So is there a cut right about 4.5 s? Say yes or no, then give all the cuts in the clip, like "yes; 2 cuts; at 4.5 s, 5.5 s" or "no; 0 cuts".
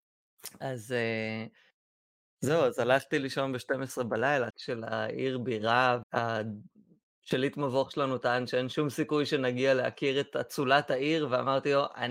yes; 2 cuts; at 4.5 s, 6.0 s